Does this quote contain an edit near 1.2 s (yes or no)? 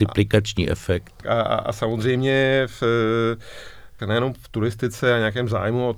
yes